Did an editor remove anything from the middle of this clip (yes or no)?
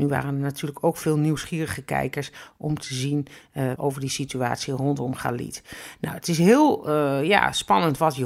yes